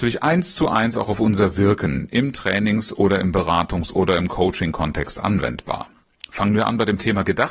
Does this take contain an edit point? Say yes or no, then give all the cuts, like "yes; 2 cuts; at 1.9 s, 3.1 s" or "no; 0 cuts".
no; 0 cuts